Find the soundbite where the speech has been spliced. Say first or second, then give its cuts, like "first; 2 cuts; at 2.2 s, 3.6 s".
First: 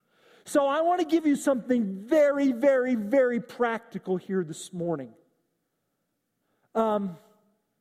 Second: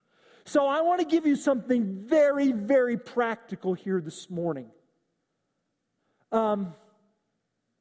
second; 1 cut; at 2.5 s